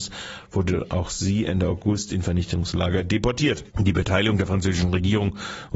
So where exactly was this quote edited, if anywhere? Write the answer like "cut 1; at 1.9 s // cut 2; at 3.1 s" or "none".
cut 1; at 3.7 s